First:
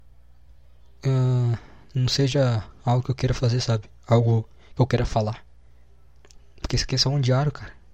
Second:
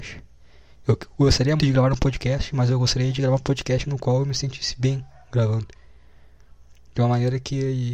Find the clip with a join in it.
second; 1 cut; at 1.6 s

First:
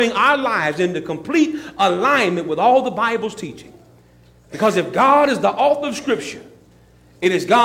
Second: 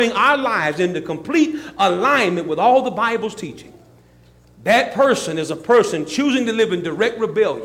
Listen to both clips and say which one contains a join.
second; 1 cut; at 4.4 s

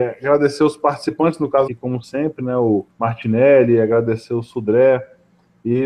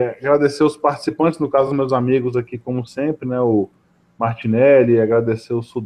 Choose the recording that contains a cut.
first; 2 cuts; at 1.7 s, 2.9 s

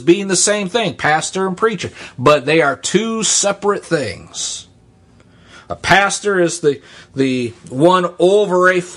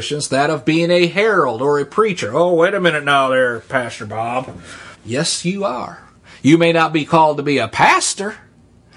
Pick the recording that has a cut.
second; 1 cut; at 4.9 s

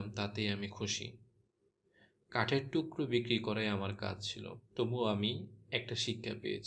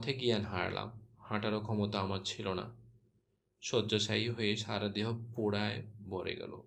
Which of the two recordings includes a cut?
first; 1 cut; at 4.7 s

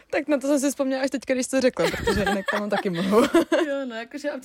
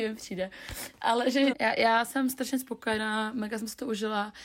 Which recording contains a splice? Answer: second; 1 cut; at 1.5 s

